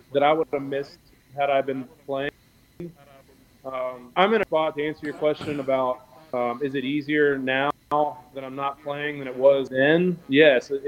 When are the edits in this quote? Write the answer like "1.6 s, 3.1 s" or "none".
4.2 s